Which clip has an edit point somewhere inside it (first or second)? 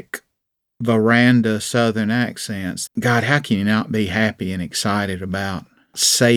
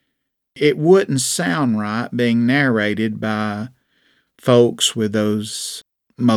first